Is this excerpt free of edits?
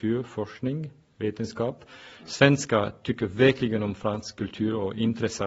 yes; 0 cuts

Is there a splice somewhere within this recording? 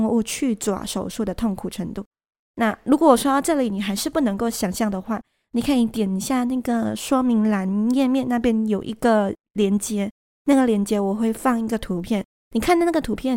no; 0 cuts

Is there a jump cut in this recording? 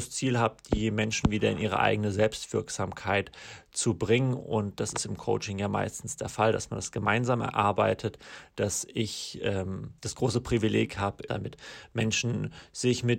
yes; 2 cuts; at 10.0 s, 11.3 s

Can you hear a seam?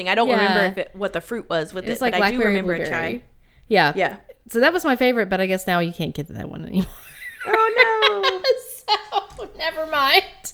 no; 0 cuts

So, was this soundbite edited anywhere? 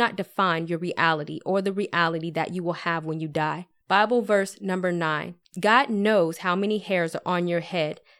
yes; 2 cuts; at 3.8 s, 5.4 s

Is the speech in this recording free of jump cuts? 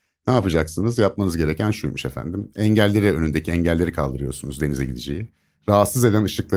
yes; 0 cuts

